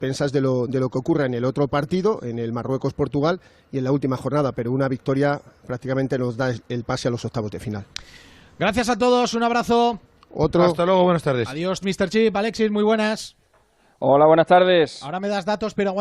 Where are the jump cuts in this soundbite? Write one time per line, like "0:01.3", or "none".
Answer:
0:11.8